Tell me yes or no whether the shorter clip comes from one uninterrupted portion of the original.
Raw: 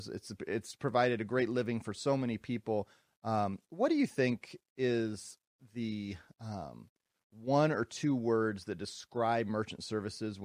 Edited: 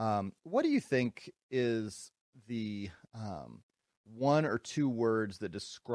yes